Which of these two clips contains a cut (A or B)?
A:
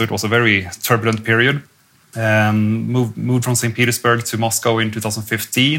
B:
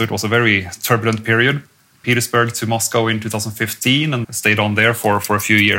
B